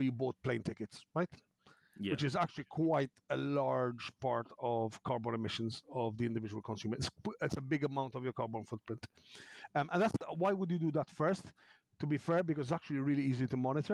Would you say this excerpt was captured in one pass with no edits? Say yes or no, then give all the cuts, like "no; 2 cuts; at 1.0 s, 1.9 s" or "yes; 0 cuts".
yes; 0 cuts